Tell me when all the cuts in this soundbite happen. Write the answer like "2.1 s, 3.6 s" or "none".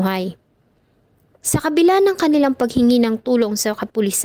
1.4 s